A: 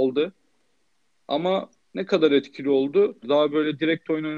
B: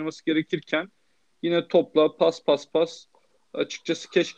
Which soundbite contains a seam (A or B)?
A